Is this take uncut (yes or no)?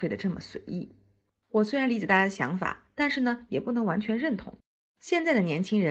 yes